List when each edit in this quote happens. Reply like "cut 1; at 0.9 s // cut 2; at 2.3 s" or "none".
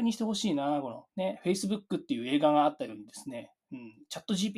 cut 1; at 1.1 s